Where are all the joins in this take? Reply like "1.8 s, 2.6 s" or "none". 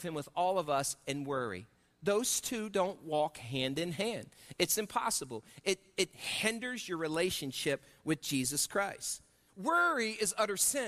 9.5 s